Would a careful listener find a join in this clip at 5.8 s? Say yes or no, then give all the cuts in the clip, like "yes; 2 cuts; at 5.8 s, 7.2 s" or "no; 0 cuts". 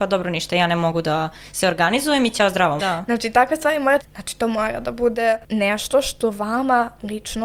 no; 2 cuts; at 2.8 s, 4.0 s